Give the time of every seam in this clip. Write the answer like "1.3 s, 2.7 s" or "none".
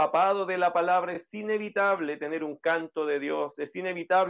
none